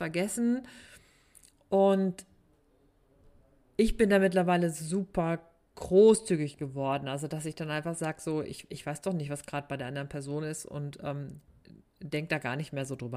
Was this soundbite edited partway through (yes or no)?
no